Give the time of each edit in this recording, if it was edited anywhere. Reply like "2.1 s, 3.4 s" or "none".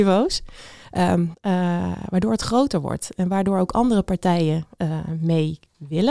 1.3 s